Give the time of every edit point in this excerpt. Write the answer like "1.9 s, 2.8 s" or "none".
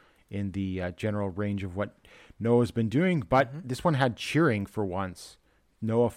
none